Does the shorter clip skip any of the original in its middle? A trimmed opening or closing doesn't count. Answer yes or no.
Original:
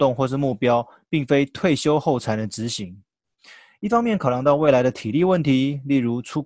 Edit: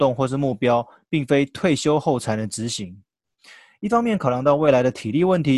no